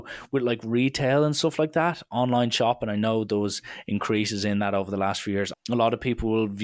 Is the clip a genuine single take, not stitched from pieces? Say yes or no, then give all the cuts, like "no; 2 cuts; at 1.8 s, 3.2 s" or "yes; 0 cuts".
no; 1 cut; at 5.5 s